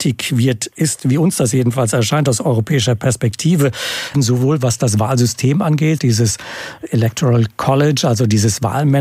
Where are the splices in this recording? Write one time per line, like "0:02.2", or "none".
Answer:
0:04.1
0:06.0